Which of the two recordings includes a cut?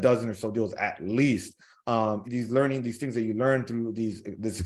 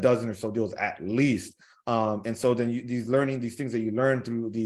first; 1 cut; at 2.2 s

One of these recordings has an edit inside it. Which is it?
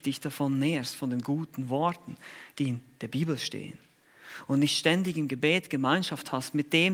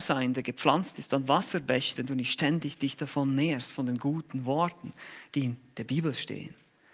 second; 1 cut; at 2.0 s

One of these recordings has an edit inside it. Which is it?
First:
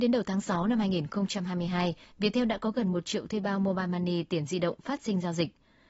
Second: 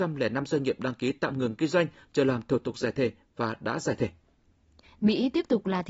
second; 1 cut; at 4.8 s

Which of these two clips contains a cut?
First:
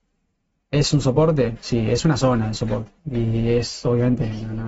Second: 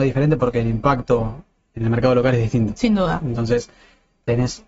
first; 1 cut; at 3.0 s

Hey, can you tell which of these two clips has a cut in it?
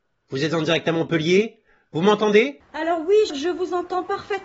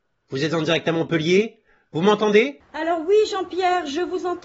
first; 1 cut; at 3.3 s

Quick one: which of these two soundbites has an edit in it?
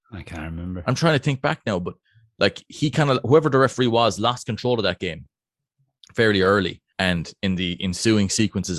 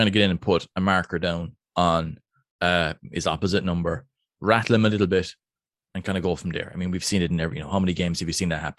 first; 1 cut; at 6.9 s

